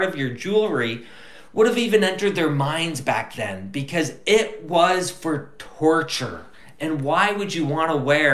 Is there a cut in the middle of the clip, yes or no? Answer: no